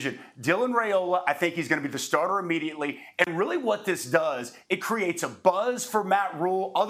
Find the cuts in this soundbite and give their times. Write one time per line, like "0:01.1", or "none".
none